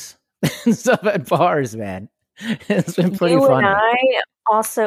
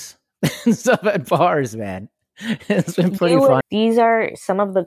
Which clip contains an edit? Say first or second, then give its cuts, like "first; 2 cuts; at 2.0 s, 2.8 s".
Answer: second; 1 cut; at 3.6 s